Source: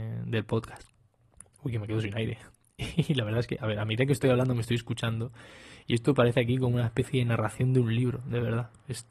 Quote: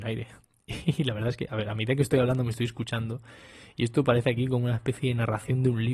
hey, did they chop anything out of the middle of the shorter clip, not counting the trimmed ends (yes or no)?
no